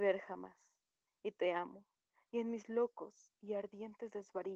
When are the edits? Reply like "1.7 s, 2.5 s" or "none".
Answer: none